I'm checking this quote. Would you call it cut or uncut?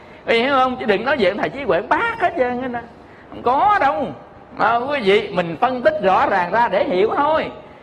uncut